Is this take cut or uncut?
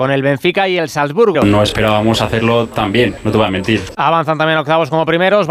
cut